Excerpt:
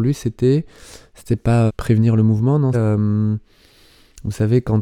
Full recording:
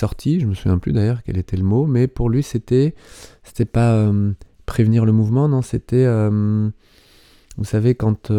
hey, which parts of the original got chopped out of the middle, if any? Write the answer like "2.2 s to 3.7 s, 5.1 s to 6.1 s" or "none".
4.0 s to 4.6 s, 5.6 s to 6.1 s